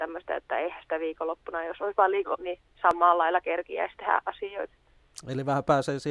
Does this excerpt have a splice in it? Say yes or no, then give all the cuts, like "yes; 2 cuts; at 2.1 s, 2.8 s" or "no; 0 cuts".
yes; 1 cut; at 2.4 s